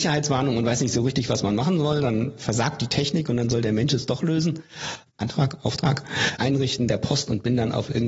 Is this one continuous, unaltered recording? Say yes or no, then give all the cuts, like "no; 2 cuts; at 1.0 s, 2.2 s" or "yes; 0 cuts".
no; 2 cuts; at 5.1 s, 6.4 s